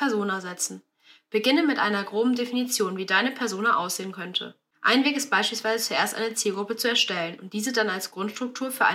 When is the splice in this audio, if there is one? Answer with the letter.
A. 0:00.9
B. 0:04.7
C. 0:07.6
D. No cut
D